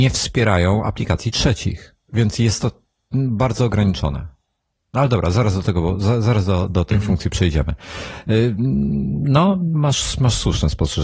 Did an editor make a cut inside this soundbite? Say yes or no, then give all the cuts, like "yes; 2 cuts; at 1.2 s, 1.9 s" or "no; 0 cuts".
no; 0 cuts